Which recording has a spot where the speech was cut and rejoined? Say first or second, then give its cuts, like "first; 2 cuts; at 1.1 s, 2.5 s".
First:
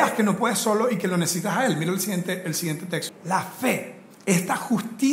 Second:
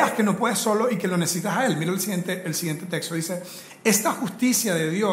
first; 1 cut; at 3.1 s